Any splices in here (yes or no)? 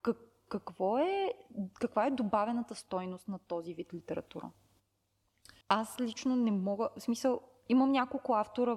yes